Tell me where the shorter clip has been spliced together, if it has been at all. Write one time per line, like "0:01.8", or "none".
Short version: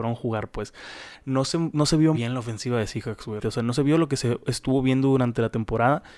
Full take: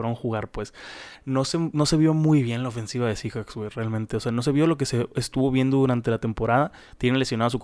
0:02.1
0:03.4